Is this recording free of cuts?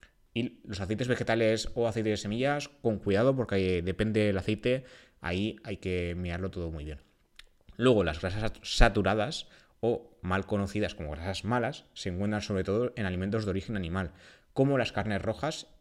yes; 0 cuts

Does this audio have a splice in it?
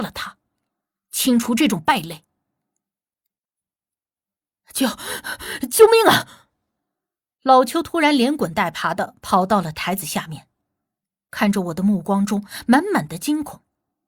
no; 0 cuts

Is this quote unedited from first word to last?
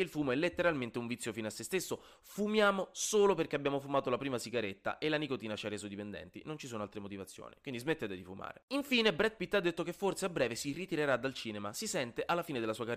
yes; 0 cuts

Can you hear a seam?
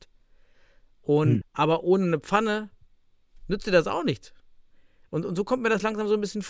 yes; 1 cut; at 1.4 s

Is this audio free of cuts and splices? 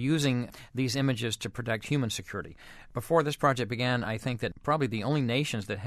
yes; 0 cuts

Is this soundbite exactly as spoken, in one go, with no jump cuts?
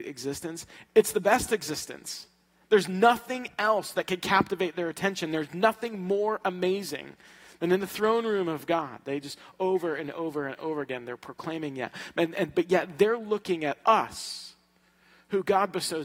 yes; 0 cuts

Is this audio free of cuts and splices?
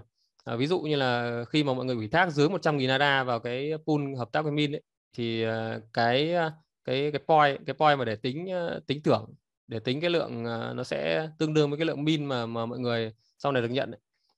yes; 0 cuts

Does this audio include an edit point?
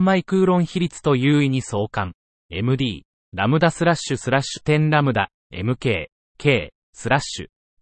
no; 0 cuts

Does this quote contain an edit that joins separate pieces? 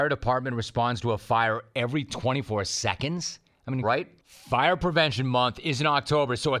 yes; 1 cut; at 3.8 s

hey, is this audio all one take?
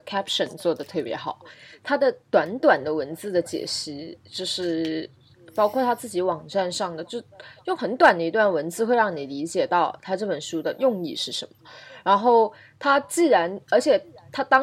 yes; 0 cuts

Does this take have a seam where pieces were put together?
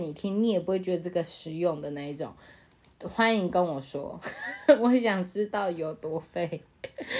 no; 0 cuts

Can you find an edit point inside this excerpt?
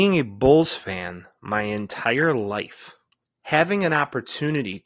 yes; 1 cut; at 3.2 s

